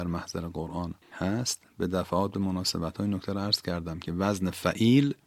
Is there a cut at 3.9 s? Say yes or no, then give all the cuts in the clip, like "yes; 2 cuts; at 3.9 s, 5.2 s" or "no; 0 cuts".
no; 1 cut; at 1.0 s